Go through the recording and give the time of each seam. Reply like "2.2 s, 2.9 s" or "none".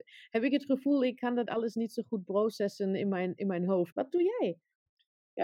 3.9 s